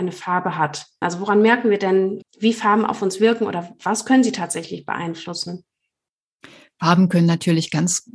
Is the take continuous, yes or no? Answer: no